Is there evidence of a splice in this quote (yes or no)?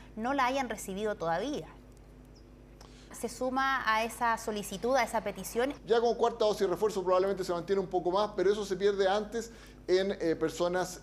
yes